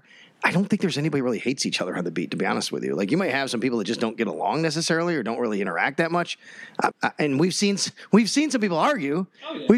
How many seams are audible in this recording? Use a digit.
1